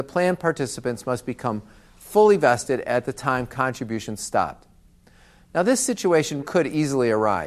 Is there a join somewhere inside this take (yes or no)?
yes